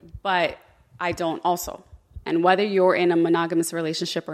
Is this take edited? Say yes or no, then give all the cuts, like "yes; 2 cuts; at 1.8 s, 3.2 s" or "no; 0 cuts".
yes; 1 cut; at 2.2 s